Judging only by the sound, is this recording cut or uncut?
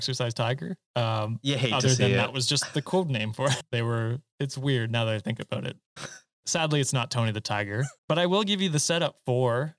cut